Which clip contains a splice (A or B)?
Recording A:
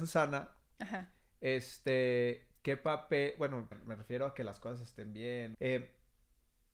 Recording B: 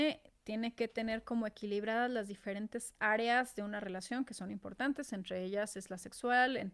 A